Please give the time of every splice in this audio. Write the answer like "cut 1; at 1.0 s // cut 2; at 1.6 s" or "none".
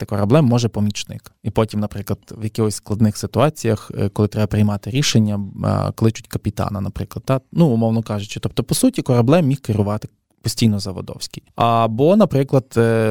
none